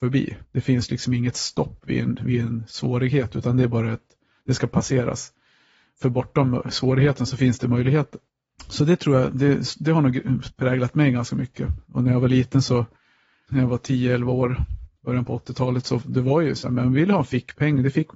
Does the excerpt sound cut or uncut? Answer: uncut